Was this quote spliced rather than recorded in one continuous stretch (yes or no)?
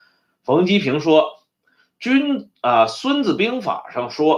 no